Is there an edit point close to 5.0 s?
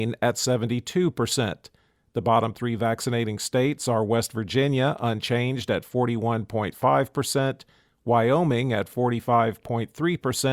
no; 0 cuts

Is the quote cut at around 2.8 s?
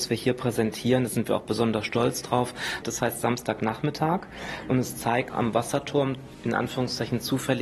yes; 2 cuts; at 2.8 s, 5.3 s

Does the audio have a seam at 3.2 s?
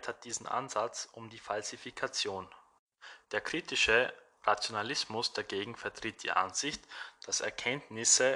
yes; 1 cut; at 3.2 s

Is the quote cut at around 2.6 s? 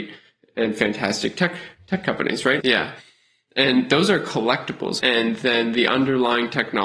yes; 2 cuts; at 2.6 s, 5.0 s

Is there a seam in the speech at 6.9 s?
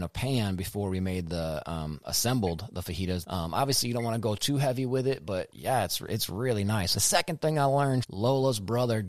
yes; 3 cuts; at 3.2 s, 6.9 s, 8.0 s

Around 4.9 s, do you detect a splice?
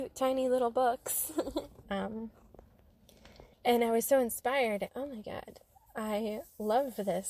yes; 3 cuts; at 1.8 s, 3.5 s, 4.9 s

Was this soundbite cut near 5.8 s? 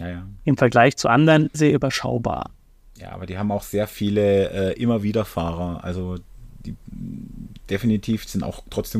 no; 1 cut; at 1.5 s

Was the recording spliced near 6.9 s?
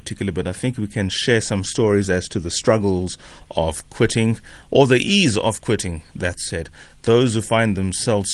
no; 0 cuts

